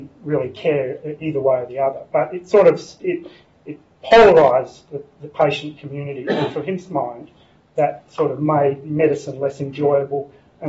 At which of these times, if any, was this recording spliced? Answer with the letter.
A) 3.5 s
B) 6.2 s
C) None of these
C